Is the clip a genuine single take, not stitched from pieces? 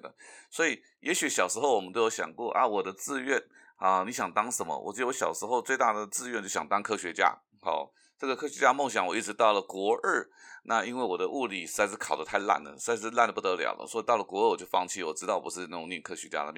yes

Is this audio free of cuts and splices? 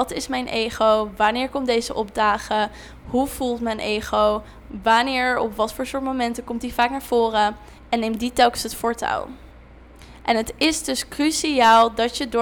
no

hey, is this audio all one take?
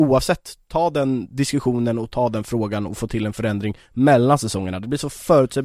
yes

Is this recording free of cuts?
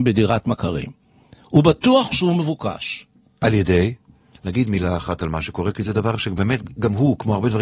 no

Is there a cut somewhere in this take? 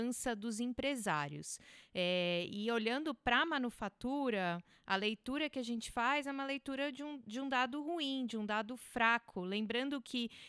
no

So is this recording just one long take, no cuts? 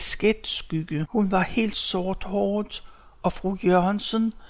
no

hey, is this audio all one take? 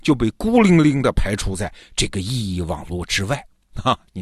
yes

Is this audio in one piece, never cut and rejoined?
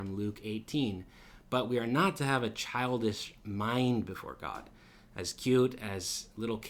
yes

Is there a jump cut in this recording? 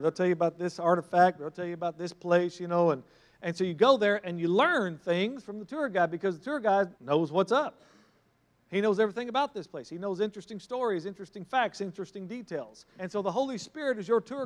yes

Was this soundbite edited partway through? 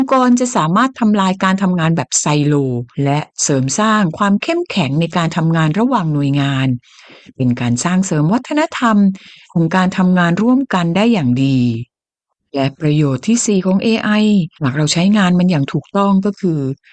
yes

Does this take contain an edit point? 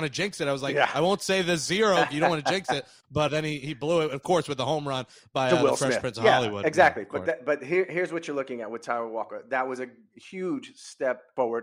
yes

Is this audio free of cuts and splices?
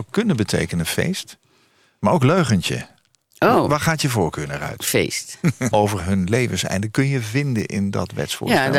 no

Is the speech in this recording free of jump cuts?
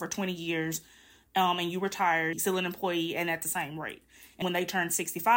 no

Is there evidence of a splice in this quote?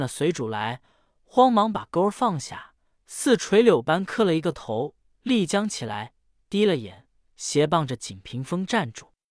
no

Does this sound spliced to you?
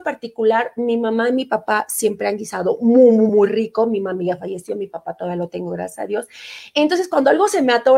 no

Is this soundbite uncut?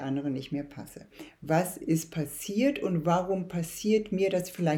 yes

